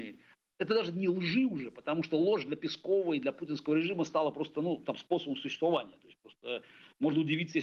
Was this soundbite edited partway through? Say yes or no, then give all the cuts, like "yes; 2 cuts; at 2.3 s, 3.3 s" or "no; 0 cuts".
no; 0 cuts